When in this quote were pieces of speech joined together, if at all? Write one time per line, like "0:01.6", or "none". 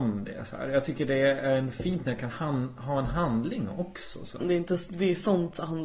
0:04.4